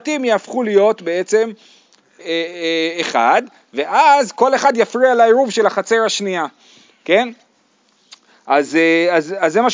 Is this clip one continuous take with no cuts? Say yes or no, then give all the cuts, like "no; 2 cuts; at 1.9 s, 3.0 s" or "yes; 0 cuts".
no; 1 cut; at 2.2 s